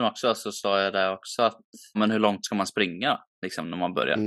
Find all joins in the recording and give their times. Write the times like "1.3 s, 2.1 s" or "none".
1.9 s